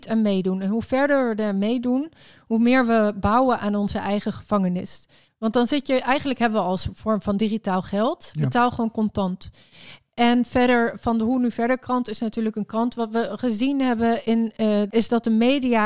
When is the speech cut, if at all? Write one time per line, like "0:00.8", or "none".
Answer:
0:05.3
0:14.9